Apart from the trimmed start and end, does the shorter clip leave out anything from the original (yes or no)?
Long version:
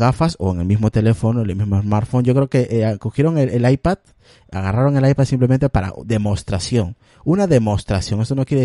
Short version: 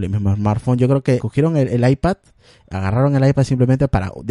yes